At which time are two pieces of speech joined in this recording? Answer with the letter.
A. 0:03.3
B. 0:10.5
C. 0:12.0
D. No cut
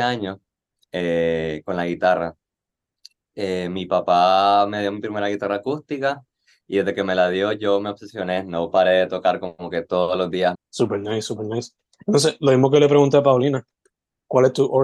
B